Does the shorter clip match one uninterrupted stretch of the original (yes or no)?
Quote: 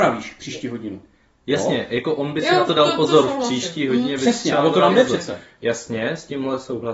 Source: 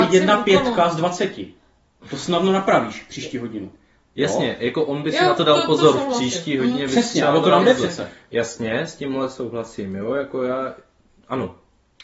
yes